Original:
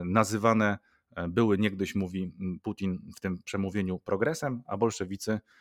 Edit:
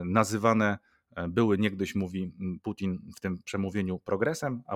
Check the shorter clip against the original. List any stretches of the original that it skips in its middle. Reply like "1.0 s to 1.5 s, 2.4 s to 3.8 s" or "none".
none